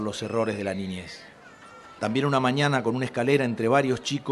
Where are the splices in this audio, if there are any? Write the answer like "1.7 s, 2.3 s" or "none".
2.0 s